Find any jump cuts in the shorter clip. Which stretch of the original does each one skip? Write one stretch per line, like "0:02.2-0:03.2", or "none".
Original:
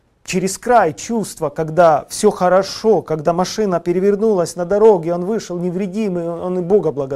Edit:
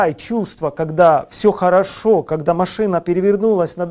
none